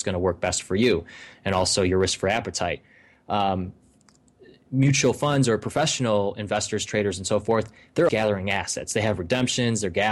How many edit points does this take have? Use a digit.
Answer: 1